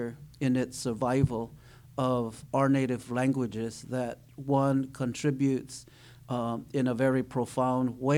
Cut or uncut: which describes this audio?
uncut